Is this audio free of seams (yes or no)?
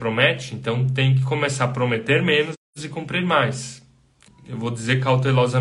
no